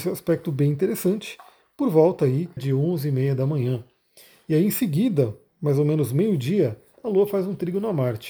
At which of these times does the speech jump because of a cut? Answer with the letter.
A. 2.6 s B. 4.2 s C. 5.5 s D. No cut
A